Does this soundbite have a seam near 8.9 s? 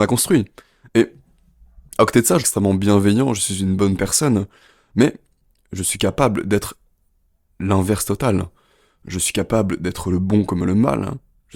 no; 1 cut; at 2.4 s

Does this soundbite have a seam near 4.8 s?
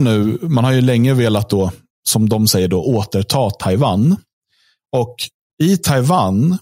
yes; 1 cut; at 4.8 s

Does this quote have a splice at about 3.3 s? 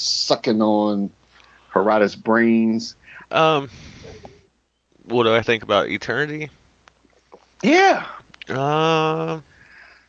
yes; 1 cut; at 3.3 s

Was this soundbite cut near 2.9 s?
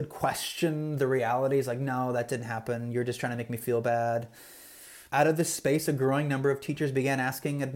no; 1 cut; at 5.1 s

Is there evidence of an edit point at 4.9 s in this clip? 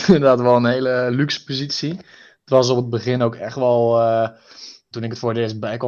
yes; 1 cut; at 4.9 s

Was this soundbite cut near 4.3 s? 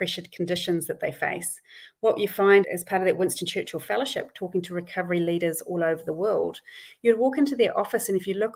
no; 1 cut; at 2.6 s

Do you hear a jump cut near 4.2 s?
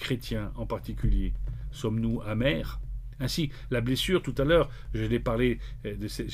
no; 0 cuts

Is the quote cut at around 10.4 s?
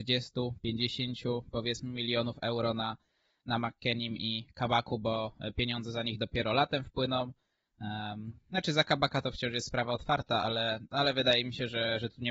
no; 0 cuts

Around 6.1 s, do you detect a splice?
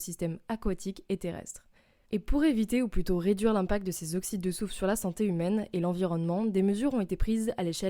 no; 1 cut; at 2.0 s

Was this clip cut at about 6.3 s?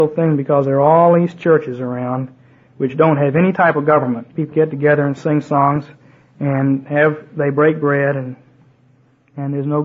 no; 1 cut; at 4.5 s

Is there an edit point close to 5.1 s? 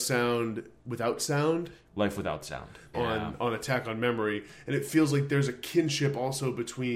no; 1 cut; at 2.9 s

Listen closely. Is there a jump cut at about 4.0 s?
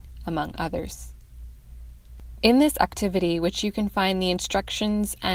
no; 1 cut; at 2.4 s

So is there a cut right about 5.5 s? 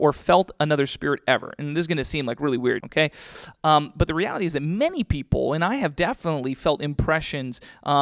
no; 1 cut; at 2.8 s

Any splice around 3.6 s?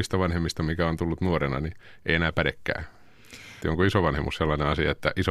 yes; 1 cut; at 3.6 s

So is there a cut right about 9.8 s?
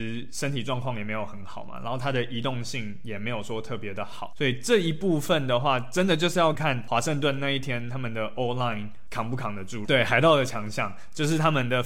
yes; 2 cuts; at 6.5 s, 9.8 s

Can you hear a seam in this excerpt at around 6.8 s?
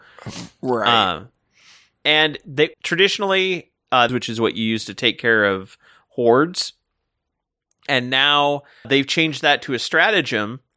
no; 3 cuts; at 2.7 s, 4.1 s, 8.8 s

